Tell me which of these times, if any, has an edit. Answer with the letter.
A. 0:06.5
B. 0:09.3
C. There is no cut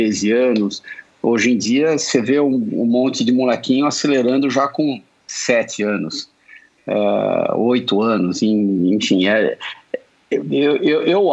C